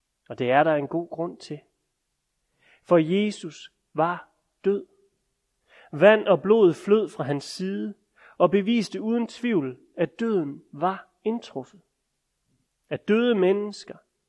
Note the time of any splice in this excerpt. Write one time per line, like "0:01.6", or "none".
0:12.7